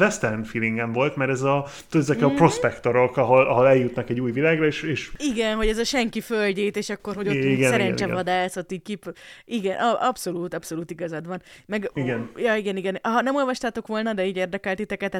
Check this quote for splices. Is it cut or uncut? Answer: uncut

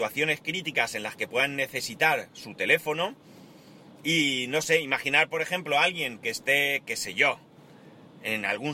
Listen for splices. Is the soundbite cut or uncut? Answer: uncut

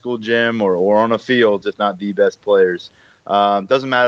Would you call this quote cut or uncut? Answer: cut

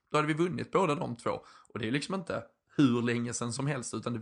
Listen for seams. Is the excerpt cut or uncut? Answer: uncut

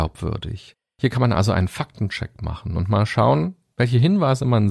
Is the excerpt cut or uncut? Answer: uncut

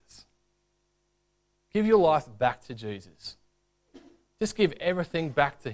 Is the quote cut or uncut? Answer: uncut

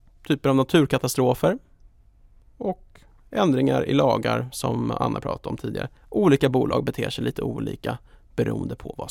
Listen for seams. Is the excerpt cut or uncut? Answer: cut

